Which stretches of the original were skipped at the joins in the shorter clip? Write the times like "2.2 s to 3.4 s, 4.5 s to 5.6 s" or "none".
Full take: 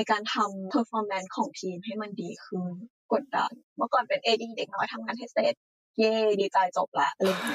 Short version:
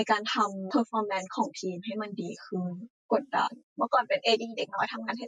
none